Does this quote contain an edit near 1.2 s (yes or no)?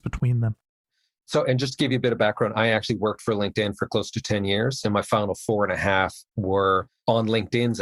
no